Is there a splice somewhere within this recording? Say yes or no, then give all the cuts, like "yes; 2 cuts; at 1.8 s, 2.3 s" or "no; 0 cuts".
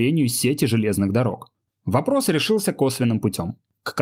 no; 0 cuts